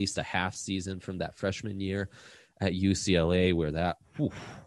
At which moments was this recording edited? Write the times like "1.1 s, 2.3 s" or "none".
none